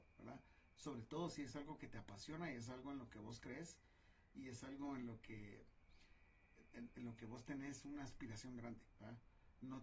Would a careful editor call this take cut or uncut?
uncut